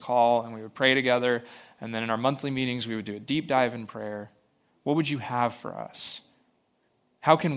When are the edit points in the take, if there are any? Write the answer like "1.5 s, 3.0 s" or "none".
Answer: 4.7 s